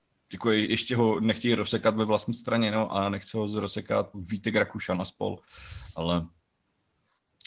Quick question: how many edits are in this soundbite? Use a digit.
1